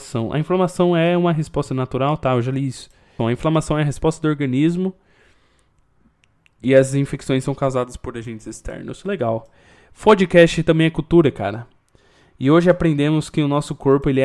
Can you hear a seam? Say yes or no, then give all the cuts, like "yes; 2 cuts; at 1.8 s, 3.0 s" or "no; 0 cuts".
yes; 1 cut; at 3.2 s